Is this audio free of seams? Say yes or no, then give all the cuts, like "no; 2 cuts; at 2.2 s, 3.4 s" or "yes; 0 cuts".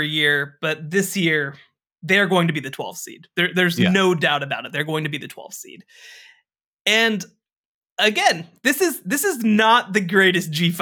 yes; 0 cuts